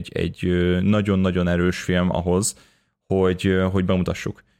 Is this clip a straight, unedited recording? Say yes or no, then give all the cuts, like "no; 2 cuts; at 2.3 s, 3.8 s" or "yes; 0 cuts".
yes; 0 cuts